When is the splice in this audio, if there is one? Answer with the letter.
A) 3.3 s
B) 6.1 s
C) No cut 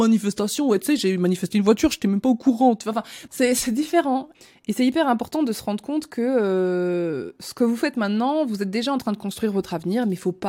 A